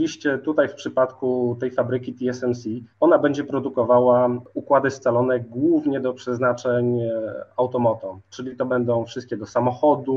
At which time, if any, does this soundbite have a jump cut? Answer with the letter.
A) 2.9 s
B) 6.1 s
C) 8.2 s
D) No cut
A